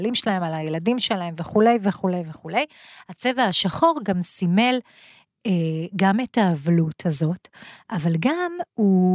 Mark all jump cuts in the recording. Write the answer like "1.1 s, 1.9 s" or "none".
none